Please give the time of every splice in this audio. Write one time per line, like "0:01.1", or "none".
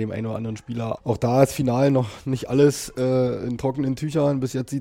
0:01.0